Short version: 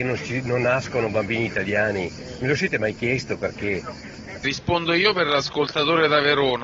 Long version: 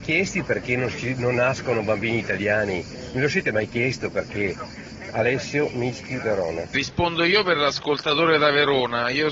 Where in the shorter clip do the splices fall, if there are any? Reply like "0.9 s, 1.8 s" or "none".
4.4 s